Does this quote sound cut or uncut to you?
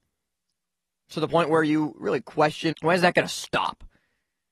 cut